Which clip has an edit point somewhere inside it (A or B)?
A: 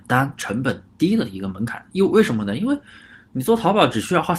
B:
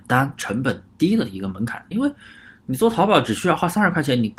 B